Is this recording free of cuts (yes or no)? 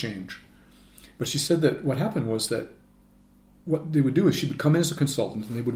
yes